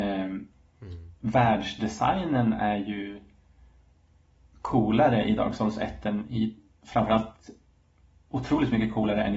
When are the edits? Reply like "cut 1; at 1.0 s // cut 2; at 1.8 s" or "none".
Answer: none